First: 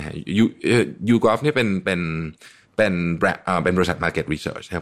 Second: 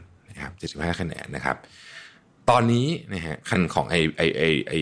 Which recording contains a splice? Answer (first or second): second